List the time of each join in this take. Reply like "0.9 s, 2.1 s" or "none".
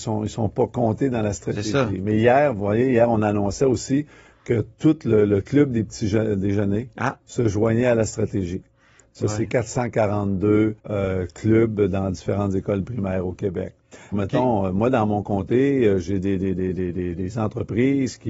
10.8 s, 14.1 s